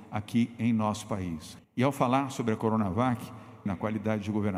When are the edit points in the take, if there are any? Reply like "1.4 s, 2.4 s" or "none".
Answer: 1.6 s, 3.7 s